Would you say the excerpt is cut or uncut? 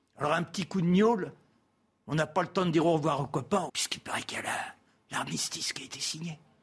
cut